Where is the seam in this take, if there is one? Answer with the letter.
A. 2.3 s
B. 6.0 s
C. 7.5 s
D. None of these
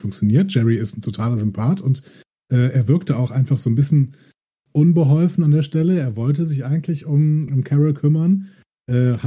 C